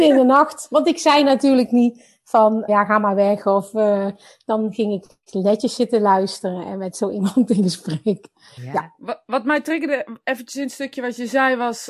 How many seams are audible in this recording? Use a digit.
2